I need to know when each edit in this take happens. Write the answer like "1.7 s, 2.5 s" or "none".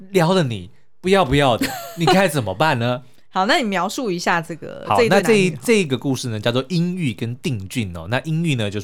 none